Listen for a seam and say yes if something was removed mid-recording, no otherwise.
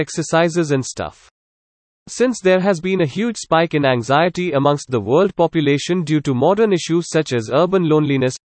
yes